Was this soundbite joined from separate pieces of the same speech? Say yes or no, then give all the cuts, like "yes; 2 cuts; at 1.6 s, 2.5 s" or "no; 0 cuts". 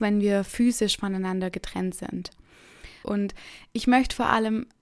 yes; 1 cut; at 3.0 s